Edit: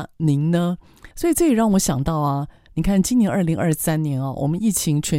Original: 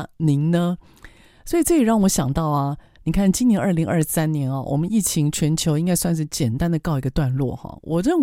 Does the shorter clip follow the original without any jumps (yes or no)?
no